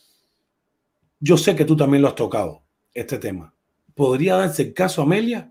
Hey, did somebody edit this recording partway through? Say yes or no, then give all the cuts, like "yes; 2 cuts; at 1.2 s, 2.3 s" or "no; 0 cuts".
no; 0 cuts